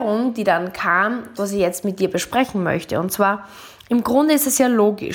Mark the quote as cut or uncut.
cut